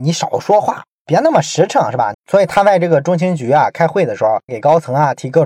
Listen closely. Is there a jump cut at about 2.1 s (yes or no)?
yes